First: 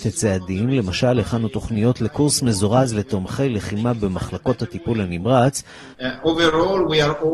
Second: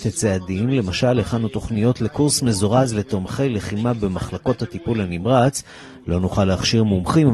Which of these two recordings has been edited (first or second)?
first